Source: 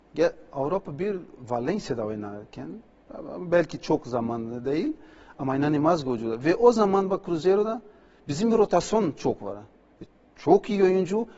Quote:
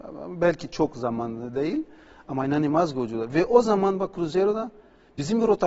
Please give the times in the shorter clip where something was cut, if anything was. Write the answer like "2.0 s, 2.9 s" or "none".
none

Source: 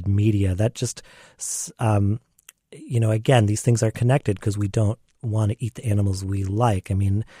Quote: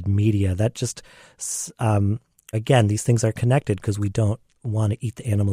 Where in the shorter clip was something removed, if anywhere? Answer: 2.5 s

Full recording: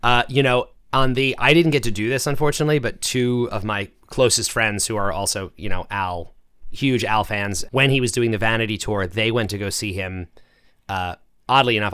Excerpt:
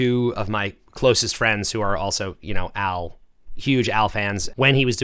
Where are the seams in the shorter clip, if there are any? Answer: none

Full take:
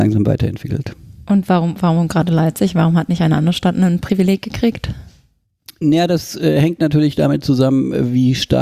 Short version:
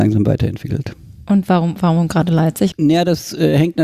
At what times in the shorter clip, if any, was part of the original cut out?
2.7 s

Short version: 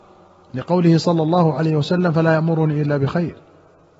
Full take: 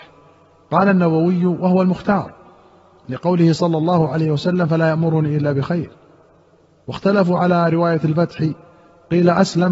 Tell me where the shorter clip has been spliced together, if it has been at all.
none

